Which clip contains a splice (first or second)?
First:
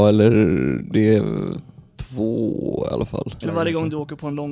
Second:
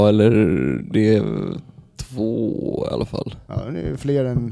first